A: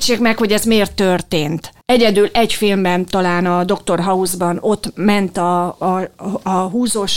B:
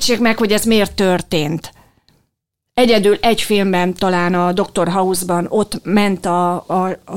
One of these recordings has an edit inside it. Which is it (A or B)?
A